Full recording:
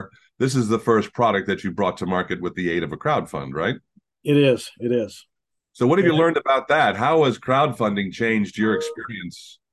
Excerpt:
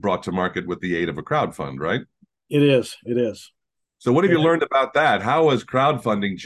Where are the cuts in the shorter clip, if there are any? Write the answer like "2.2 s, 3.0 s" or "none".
none